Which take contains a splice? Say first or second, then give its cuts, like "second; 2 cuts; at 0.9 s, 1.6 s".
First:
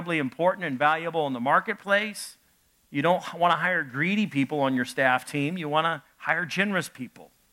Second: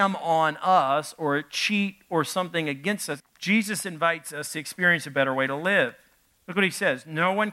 second; 2 cuts; at 3.2 s, 6.4 s